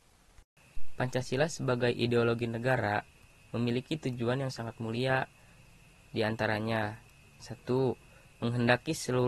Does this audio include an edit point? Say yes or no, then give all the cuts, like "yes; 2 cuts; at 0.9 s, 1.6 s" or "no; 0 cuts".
no; 0 cuts